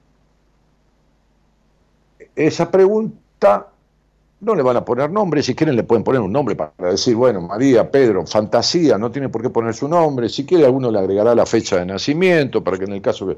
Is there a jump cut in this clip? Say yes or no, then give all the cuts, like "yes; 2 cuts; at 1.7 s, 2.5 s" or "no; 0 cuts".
no; 0 cuts